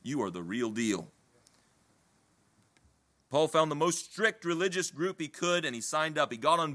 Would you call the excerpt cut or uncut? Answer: uncut